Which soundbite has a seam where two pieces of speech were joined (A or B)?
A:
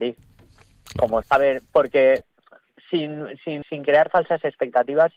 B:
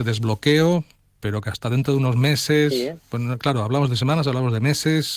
A